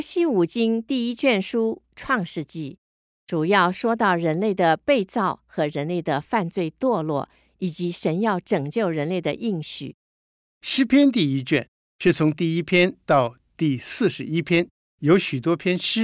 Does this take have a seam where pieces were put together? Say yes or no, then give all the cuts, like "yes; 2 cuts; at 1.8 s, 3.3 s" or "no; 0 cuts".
yes; 1 cut; at 14.9 s